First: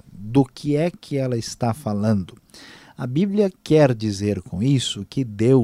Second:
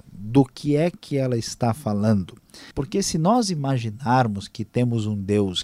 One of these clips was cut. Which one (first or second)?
second